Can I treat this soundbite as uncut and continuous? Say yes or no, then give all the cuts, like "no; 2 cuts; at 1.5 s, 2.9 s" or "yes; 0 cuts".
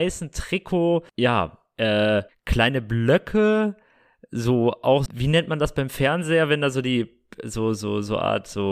no; 3 cuts; at 1.1 s, 2.3 s, 5.1 s